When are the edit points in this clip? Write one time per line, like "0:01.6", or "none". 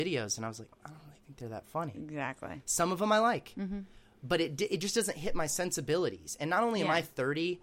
none